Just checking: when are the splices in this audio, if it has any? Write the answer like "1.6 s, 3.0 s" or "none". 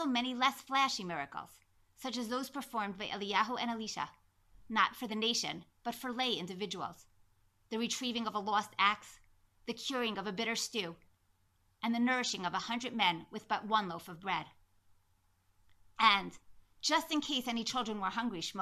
16.0 s